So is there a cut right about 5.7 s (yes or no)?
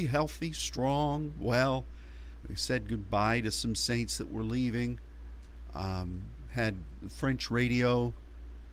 no